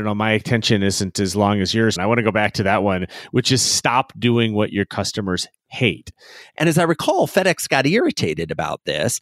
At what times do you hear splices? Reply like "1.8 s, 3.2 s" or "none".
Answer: 2.0 s, 6.5 s